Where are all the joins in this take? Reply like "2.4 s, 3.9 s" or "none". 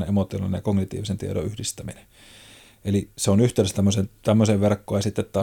none